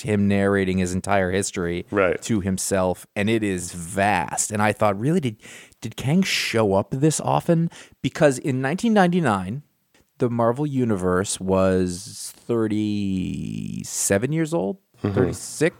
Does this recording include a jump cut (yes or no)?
no